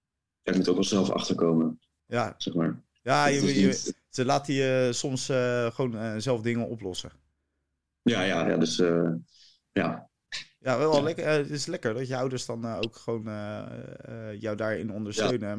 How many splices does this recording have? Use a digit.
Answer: 0